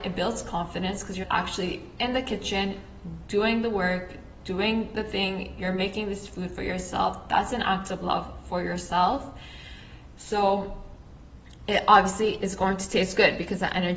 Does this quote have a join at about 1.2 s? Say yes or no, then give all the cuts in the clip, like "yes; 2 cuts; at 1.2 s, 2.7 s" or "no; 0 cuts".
yes; 1 cut; at 1.2 s